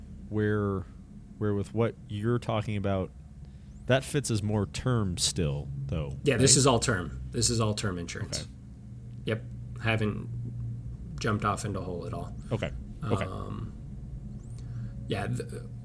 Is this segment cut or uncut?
uncut